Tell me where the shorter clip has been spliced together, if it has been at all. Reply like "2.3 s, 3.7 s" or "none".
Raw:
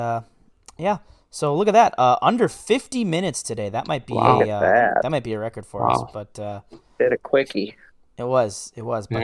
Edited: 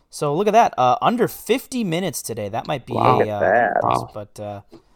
3.8 s

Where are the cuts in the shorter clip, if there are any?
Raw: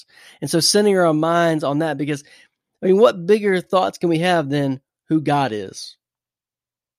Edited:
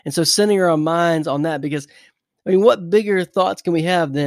none

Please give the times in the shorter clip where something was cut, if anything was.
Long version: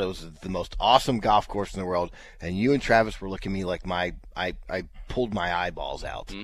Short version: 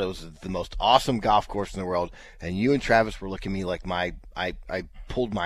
none

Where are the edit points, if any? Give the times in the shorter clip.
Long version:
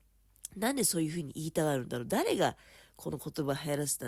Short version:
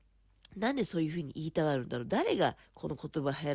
2.7 s

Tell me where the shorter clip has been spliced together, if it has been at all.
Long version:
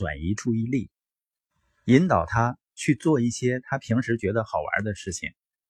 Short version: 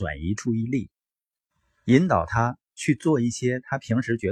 none

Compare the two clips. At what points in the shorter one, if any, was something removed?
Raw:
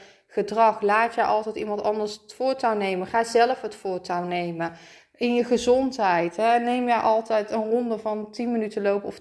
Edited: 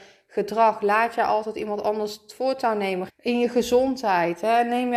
3.1 s

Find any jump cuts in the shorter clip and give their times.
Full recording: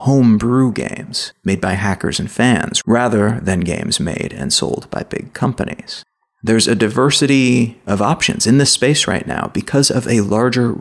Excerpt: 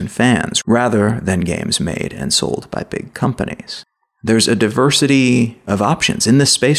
none

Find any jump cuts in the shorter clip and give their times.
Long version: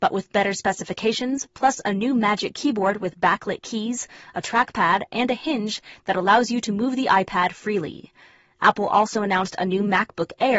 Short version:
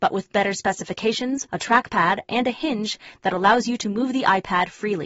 1.5 s

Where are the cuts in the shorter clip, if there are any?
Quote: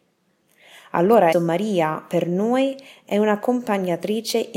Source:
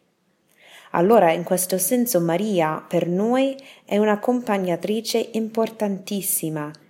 1.3 s

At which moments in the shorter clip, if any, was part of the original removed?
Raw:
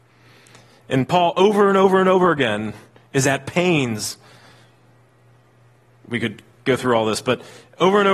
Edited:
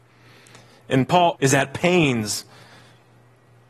1.3 s

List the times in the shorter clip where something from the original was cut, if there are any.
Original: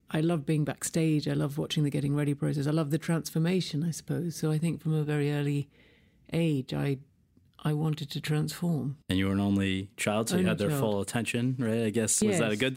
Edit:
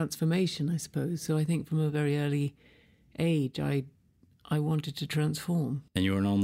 none

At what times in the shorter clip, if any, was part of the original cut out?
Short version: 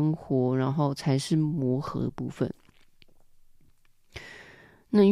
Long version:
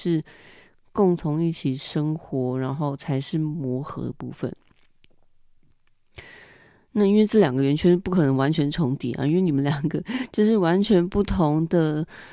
none

